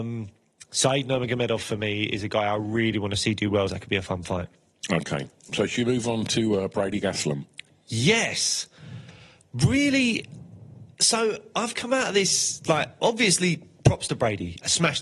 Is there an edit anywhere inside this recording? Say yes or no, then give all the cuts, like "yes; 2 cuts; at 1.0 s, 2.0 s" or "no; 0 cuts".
yes; 1 cut; at 3.7 s